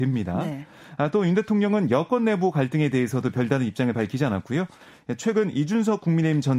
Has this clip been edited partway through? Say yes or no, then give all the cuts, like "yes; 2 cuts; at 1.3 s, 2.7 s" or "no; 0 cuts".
no; 0 cuts